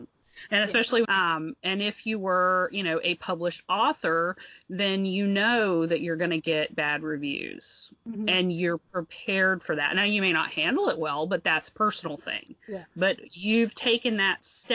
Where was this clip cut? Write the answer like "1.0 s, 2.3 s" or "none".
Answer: 1.0 s